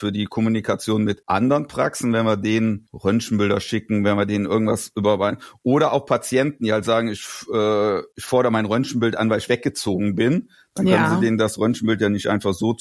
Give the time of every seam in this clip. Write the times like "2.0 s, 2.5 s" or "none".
none

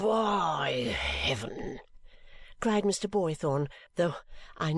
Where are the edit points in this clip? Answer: 3.9 s

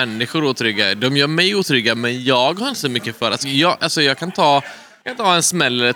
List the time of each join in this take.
3.4 s

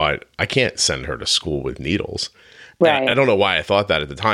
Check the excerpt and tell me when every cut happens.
none

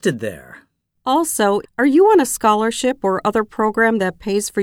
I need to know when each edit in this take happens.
1.6 s

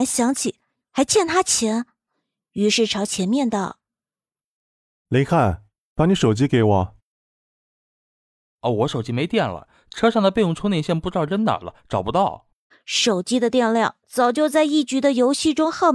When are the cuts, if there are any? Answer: 12.7 s, 14.9 s

